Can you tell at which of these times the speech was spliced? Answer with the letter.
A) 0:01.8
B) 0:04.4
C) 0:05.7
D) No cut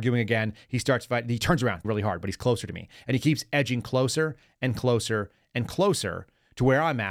A